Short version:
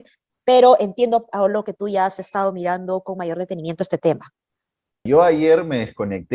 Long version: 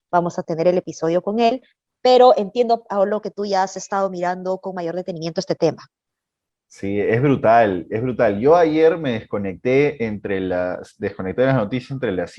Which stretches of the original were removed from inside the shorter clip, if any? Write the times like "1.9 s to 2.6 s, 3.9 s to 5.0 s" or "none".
6.6 s to 8.4 s